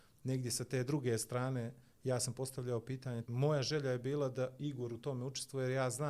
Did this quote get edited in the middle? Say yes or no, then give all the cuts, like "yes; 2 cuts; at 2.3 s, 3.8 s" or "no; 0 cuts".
yes; 1 cut; at 3.2 s